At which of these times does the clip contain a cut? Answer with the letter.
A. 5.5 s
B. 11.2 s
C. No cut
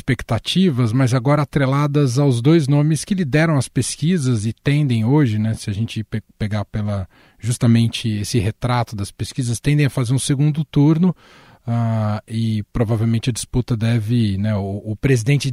C